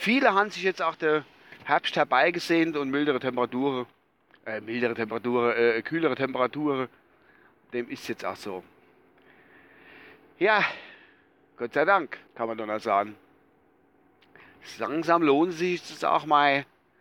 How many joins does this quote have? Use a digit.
1